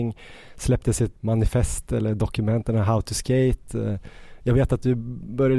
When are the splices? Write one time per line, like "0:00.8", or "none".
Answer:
0:01.2